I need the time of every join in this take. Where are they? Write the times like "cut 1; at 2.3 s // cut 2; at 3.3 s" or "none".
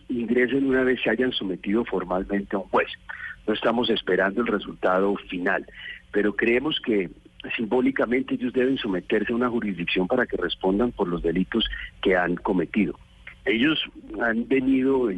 cut 1; at 13.4 s